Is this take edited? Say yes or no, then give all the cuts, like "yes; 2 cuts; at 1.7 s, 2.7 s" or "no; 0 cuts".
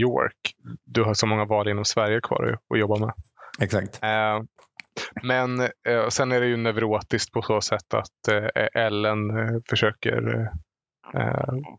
no; 0 cuts